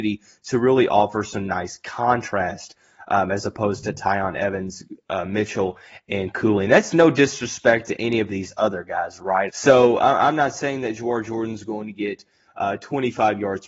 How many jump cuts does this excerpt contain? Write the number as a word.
one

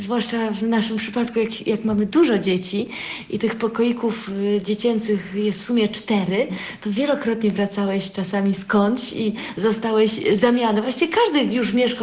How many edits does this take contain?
zero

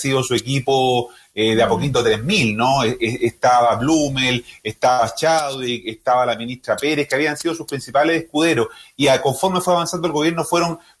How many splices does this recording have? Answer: zero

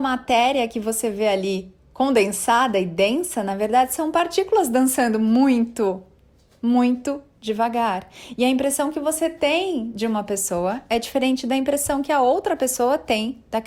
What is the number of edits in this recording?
zero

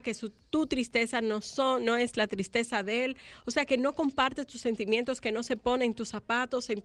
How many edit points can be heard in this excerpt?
zero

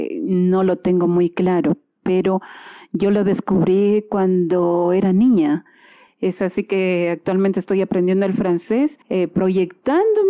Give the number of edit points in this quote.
two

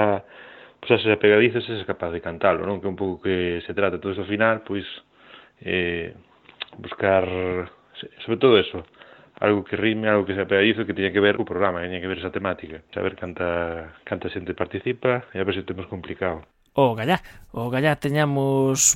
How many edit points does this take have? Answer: one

